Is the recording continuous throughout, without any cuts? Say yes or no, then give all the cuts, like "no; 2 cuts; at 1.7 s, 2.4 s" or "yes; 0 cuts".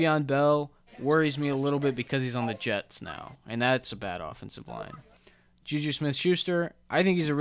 yes; 0 cuts